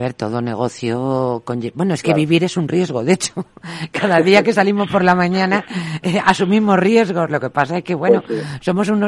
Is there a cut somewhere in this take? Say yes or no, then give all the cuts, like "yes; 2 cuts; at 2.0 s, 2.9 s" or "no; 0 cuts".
no; 0 cuts